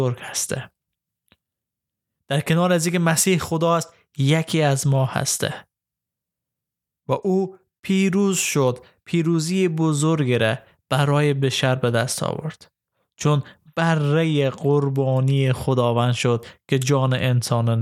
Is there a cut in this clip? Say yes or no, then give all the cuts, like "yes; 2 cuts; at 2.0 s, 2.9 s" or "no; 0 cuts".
no; 0 cuts